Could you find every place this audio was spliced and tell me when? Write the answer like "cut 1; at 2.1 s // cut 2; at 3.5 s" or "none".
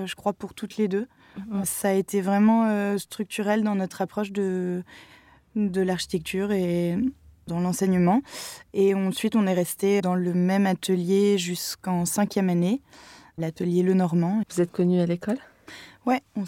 cut 1; at 10.0 s // cut 2; at 14.4 s